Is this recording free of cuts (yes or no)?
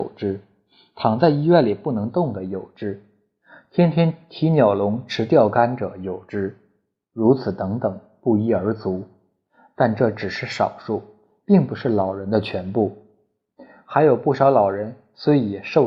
yes